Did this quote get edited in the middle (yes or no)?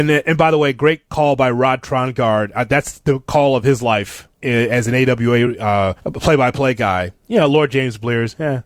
yes